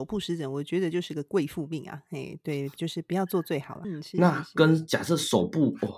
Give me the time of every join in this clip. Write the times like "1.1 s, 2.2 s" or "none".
3.8 s